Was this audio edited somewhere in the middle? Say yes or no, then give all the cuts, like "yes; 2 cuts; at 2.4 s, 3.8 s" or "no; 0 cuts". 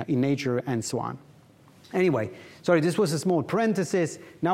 no; 0 cuts